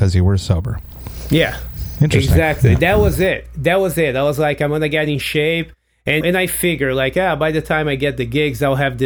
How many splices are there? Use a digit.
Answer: 1